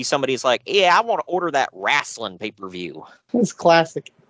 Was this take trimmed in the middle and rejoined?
yes; 1 cut; at 3.3 s

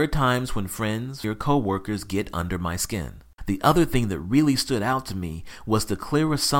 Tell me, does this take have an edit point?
yes; 2 cuts; at 1.2 s, 3.4 s

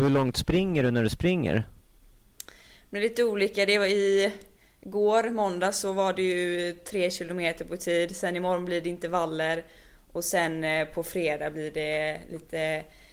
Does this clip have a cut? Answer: no; 0 cuts

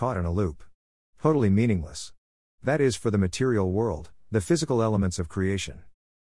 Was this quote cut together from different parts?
no; 0 cuts

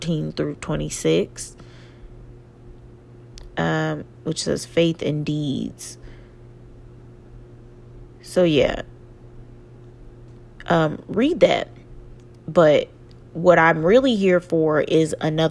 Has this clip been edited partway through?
no; 0 cuts

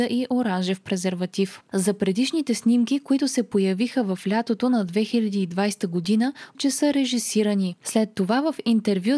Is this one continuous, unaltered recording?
no; 1 cut; at 6.5 s

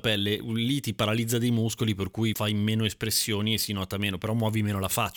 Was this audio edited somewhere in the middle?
no; 0 cuts

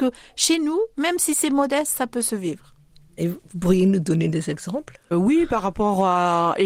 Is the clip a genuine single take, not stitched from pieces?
no; 1 cut; at 5.1 s

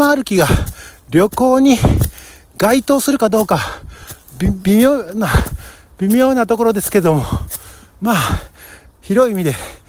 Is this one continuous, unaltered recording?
yes; 0 cuts

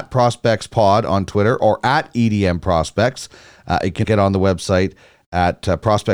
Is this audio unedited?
no; 1 cut; at 4.0 s

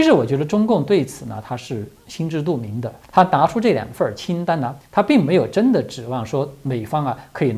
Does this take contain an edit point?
yes; 2 cuts; at 3.0 s, 4.8 s

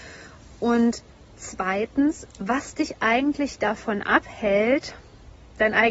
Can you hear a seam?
no; 0 cuts

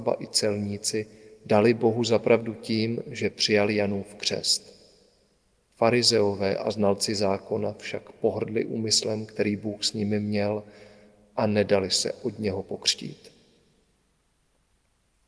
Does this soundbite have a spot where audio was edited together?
no; 0 cuts

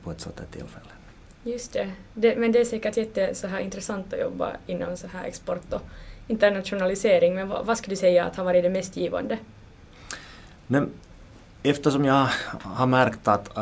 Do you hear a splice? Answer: no; 0 cuts

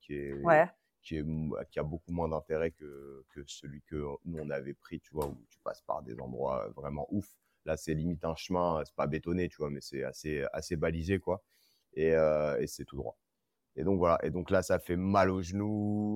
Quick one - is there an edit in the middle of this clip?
no; 0 cuts

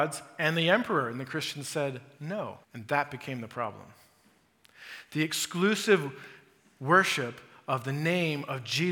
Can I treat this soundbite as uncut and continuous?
no; 1 cut; at 2.6 s

